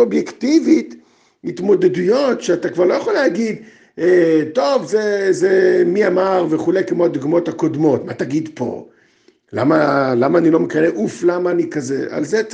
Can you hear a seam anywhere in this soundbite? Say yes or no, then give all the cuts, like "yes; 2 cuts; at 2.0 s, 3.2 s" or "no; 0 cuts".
no; 0 cuts